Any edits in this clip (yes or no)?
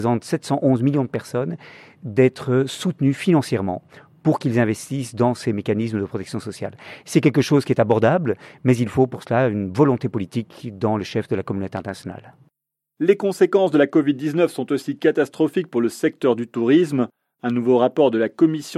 no